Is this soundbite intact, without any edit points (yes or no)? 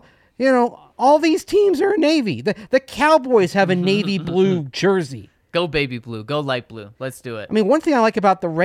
yes